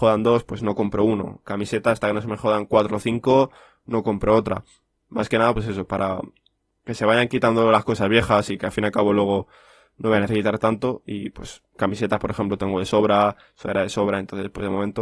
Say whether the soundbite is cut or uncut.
uncut